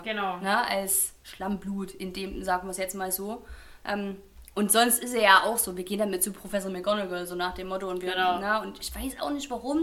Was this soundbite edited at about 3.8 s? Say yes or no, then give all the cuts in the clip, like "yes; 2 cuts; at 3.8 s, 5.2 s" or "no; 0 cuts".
no; 0 cuts